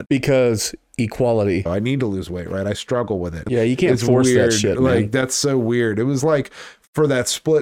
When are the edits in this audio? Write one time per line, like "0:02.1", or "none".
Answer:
0:01.7
0:03.5